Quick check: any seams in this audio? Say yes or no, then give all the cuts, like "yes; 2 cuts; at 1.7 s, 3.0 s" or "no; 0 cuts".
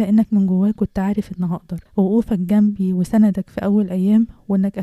yes; 1 cut; at 1.9 s